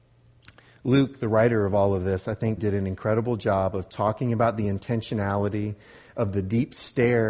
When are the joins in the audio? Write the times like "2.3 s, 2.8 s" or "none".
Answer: 2.6 s